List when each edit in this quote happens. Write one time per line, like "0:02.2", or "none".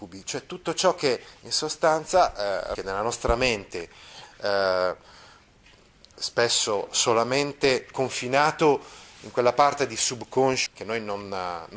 0:02.8
0:10.7